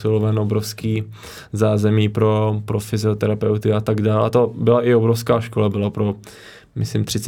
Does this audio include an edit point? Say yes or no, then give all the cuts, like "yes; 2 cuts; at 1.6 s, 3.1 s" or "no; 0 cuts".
no; 0 cuts